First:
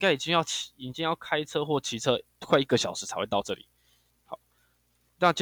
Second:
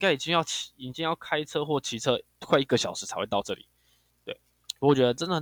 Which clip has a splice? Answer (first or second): first